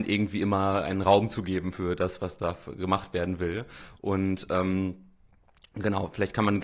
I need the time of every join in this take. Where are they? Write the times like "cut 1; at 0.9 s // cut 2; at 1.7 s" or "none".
cut 1; at 4.0 s